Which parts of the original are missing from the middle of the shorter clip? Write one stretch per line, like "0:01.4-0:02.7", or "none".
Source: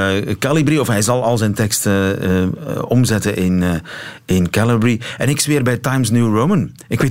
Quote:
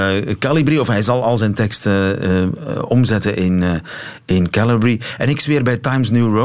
none